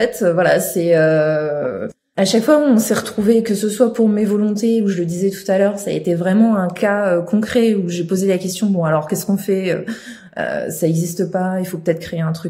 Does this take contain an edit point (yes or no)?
no